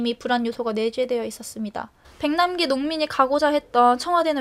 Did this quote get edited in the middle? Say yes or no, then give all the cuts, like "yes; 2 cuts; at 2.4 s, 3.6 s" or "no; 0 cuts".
yes; 1 cut; at 2.0 s